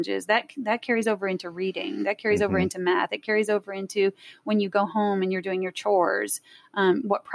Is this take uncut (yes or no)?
yes